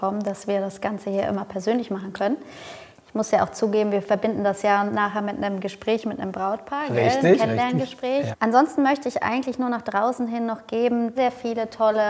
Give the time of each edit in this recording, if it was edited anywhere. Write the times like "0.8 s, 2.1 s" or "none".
8.3 s, 11.2 s